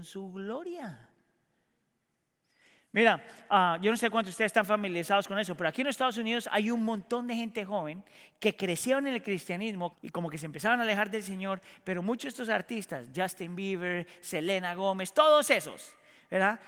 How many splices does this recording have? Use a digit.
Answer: 1